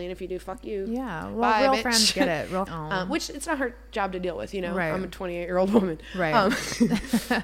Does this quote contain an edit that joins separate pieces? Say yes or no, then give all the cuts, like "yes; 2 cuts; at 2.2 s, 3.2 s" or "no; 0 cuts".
yes; 1 cut; at 2.7 s